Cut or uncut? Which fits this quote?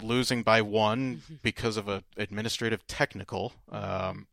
cut